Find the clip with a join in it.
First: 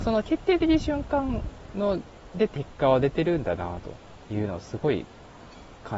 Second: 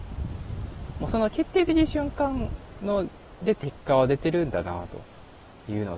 first; 1 cut; at 4.2 s

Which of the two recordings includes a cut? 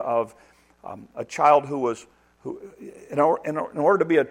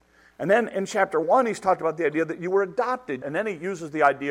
second; 1 cut; at 3.2 s

